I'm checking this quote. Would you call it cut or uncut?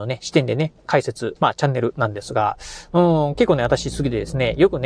cut